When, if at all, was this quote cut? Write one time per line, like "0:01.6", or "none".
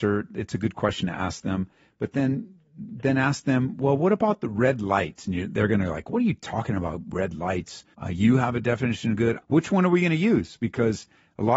0:07.9
0:09.4